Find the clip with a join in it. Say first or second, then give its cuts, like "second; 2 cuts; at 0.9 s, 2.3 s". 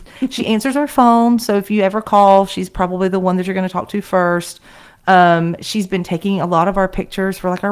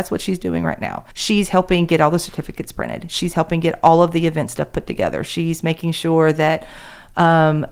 second; 1 cut; at 1.1 s